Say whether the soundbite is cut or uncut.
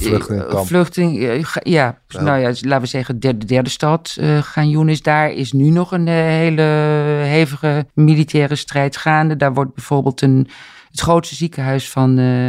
cut